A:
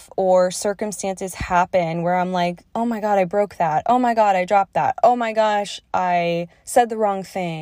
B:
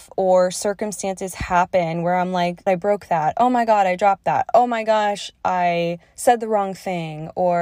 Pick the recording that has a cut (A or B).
B